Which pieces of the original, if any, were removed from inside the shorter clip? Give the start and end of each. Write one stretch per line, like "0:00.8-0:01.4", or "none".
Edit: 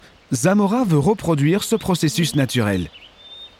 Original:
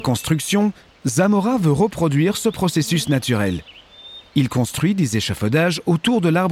none